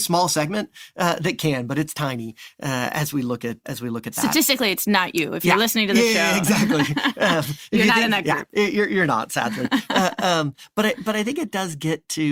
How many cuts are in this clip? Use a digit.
1